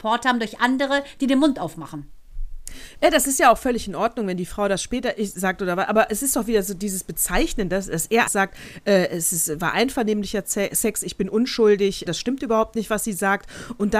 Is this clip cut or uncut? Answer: cut